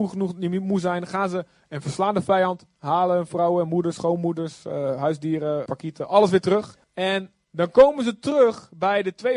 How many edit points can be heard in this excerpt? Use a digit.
2